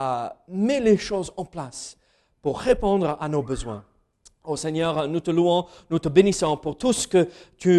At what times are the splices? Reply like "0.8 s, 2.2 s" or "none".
none